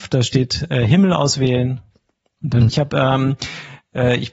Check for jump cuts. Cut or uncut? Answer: cut